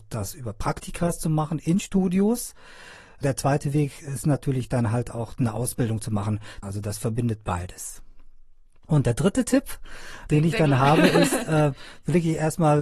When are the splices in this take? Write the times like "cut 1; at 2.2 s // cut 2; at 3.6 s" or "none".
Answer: cut 1; at 6.6 s